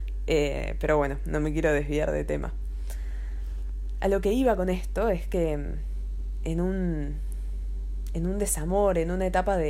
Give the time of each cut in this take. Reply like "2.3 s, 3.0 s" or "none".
none